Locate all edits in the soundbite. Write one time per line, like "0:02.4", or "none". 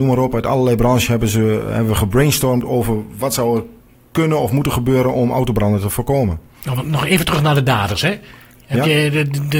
none